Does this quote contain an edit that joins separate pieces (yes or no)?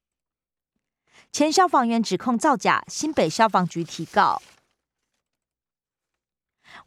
no